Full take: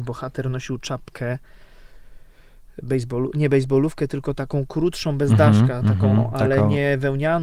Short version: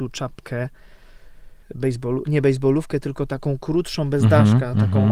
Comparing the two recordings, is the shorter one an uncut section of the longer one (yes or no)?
no